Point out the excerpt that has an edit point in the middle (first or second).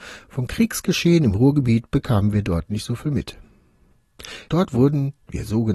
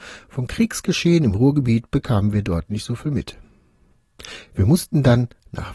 first